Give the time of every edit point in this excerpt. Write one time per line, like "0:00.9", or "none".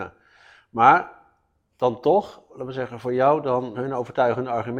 0:02.5
0:03.7